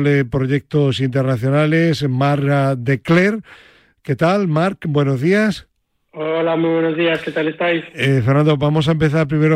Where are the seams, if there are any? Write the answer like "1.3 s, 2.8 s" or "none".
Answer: none